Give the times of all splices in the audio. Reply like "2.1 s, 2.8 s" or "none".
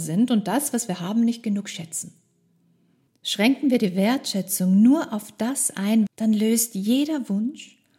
3.1 s, 6.1 s